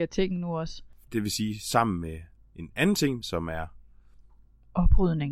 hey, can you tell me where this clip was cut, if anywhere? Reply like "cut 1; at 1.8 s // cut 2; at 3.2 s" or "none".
cut 1; at 1.1 s // cut 2; at 3.2 s